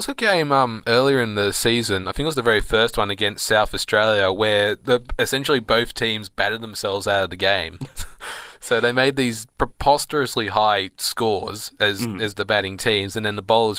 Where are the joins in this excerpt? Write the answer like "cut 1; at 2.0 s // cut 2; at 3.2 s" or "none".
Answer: none